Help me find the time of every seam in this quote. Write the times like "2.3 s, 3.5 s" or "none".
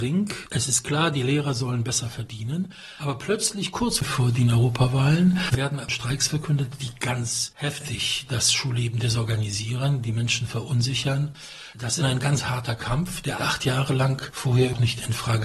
12.0 s, 13.4 s